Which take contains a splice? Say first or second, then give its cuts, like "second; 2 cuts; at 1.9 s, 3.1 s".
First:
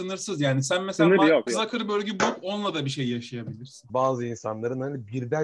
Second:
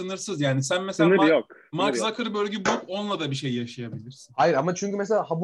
first; 2 cuts; at 1.5 s, 3.9 s